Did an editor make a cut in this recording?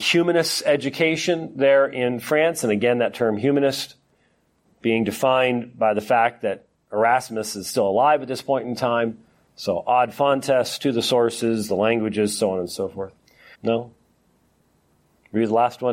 yes; 2 cuts; at 4.6 s, 13.5 s

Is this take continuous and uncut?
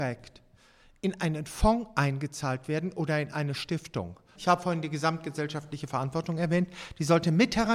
no; 1 cut; at 4.4 s

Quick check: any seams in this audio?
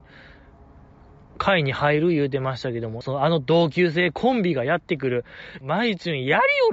yes; 2 cuts; at 3.0 s, 5.6 s

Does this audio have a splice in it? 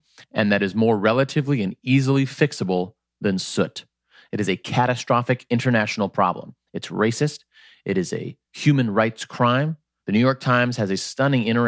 yes; 2 cuts; at 8.4 s, 10.0 s

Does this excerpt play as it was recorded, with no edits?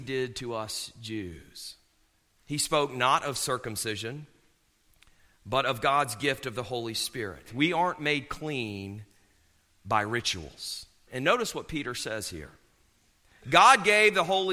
no; 3 cuts; at 2.4 s, 7.5 s, 11.1 s

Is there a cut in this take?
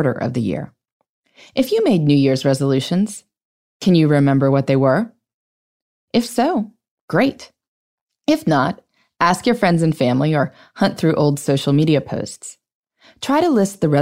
no; 0 cuts

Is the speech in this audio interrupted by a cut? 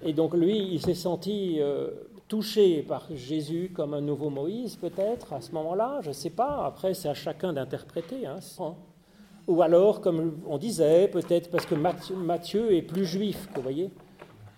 yes; 1 cut; at 8.6 s

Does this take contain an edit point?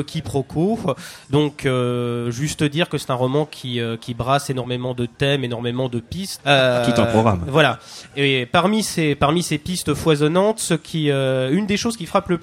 yes; 1 cut; at 6.4 s

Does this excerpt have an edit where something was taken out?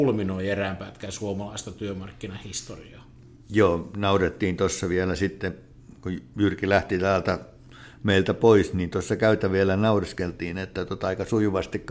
no; 0 cuts

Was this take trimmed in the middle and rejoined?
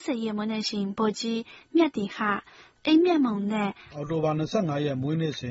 yes; 2 cuts; at 2.8 s, 3.9 s

